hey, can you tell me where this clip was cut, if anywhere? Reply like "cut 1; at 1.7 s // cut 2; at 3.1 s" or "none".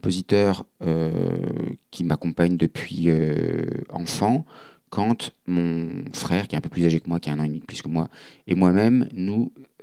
none